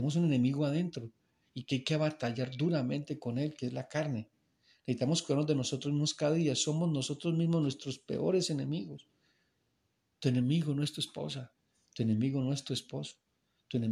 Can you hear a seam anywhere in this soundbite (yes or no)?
no